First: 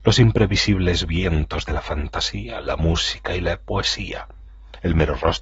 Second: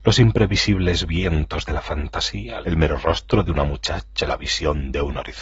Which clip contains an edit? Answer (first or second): second